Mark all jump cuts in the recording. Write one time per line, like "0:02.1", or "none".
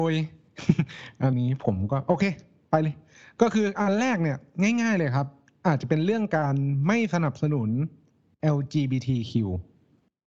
0:01.3

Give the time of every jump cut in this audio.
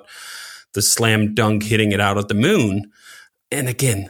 none

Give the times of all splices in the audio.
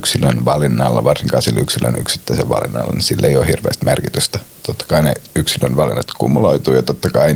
0:04.6

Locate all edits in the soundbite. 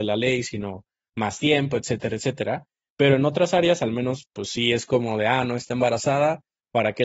none

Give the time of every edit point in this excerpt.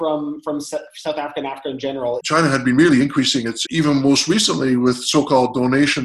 0:02.2
0:03.6

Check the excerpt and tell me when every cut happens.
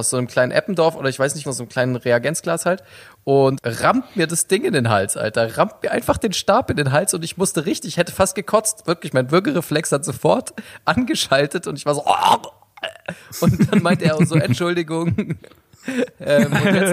0:01.4

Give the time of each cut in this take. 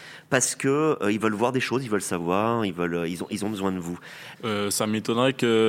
0:04.3

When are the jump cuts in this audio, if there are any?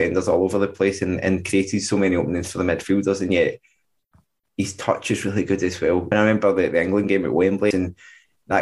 0:06.1
0:07.7

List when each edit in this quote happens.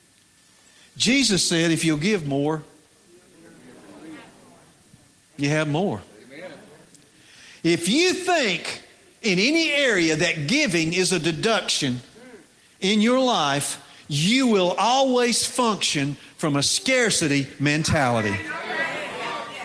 none

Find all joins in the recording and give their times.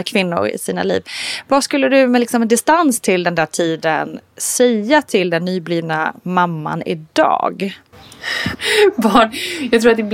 0:08.5

